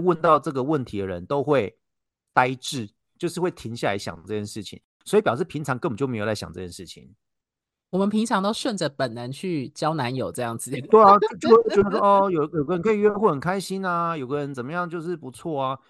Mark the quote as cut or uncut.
uncut